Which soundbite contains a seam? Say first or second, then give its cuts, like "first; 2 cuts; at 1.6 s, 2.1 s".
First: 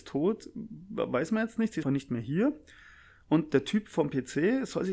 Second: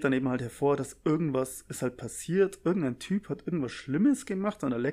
first; 1 cut; at 1.8 s